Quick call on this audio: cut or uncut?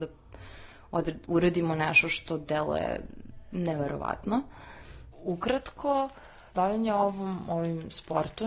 cut